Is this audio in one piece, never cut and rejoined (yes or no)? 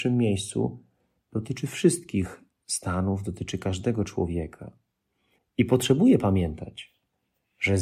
no